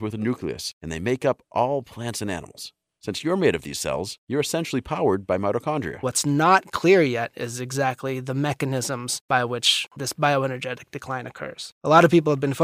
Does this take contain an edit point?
no; 0 cuts

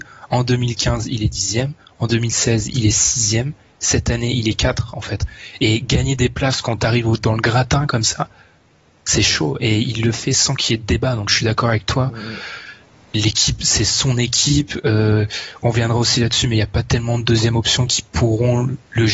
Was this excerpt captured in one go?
no; 1 cut; at 18.1 s

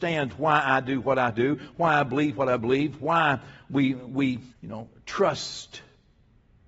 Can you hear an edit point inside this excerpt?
yes; 1 cut; at 4.5 s

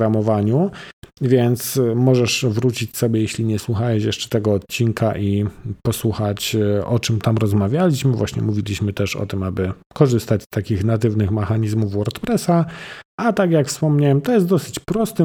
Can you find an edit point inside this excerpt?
no; 0 cuts

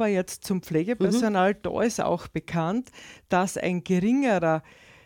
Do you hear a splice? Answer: no; 0 cuts

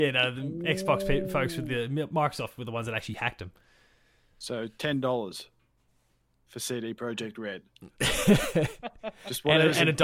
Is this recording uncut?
yes; 0 cuts

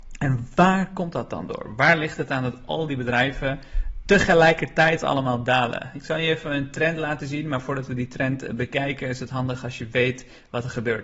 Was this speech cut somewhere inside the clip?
no; 0 cuts

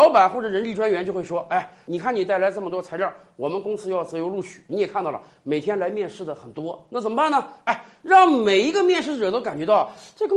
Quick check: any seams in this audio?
yes; 1 cut; at 7.6 s

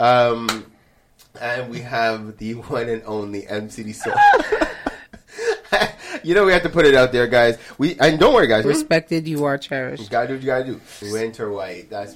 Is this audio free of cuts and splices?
no; 2 cuts; at 8.6 s, 11.0 s

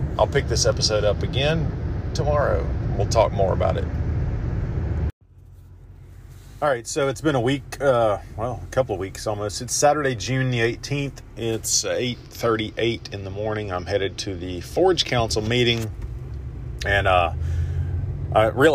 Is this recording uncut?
yes; 0 cuts

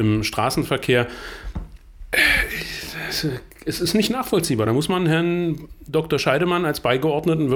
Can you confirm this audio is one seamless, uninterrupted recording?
yes; 0 cuts

